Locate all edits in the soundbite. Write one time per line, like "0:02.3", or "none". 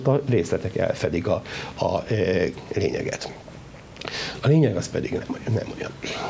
none